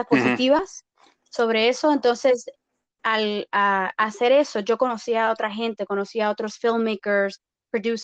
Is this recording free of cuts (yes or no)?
yes